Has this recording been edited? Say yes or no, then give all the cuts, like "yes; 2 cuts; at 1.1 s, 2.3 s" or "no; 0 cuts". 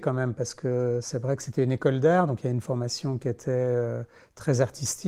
no; 0 cuts